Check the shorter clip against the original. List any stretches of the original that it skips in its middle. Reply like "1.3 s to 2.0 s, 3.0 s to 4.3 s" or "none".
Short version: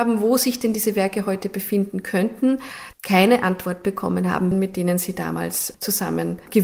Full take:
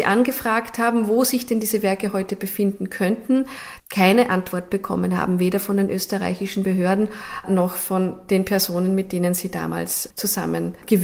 5.4 s to 8.9 s